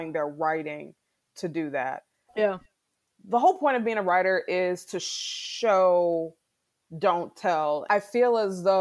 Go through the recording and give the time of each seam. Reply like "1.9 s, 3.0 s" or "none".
2.3 s